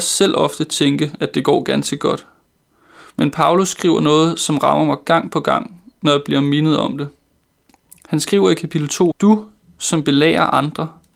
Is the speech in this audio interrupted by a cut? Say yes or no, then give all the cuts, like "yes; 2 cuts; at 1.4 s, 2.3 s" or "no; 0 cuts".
yes; 1 cut; at 9.1 s